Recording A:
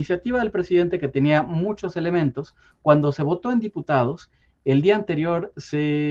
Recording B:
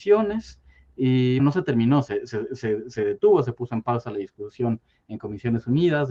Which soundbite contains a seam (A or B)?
B